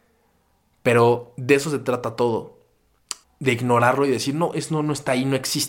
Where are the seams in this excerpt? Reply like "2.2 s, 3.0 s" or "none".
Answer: 3.2 s, 4.5 s